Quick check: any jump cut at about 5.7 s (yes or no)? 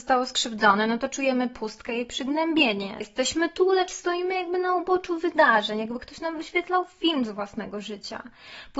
no